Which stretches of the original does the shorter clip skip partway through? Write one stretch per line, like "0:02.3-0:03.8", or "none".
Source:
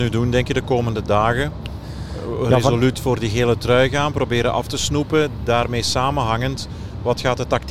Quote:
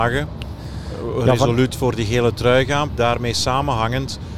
0:04.1-0:05.4